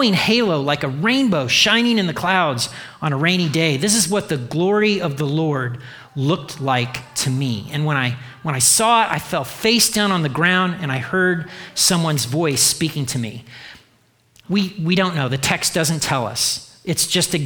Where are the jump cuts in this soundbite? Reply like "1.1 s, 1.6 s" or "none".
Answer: 14.4 s